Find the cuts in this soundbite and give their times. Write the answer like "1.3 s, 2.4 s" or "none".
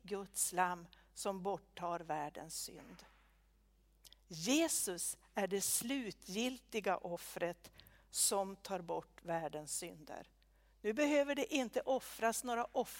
none